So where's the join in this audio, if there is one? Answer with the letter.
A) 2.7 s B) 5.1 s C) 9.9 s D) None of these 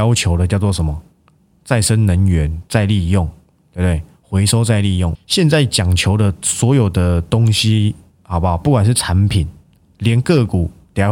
B